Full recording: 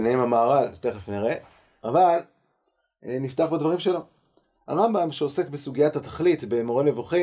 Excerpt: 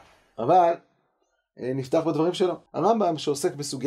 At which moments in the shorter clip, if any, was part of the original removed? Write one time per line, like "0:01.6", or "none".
0:02.7